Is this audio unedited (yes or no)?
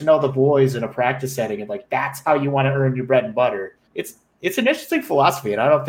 no